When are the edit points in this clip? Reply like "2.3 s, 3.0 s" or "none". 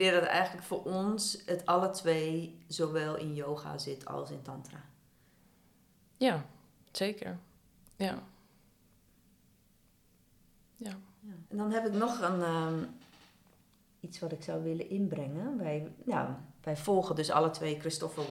11.5 s

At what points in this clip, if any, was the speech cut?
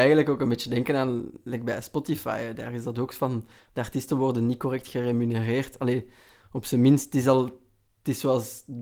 none

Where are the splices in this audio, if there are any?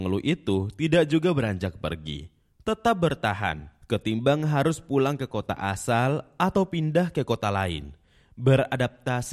none

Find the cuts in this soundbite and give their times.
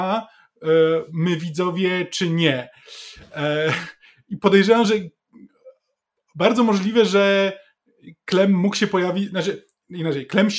none

